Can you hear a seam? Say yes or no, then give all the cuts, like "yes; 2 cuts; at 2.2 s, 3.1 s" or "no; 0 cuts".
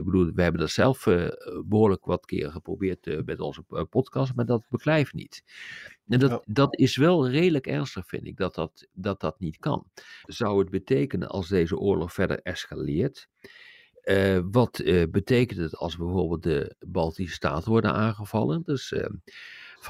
yes; 2 cuts; at 10.2 s, 18.7 s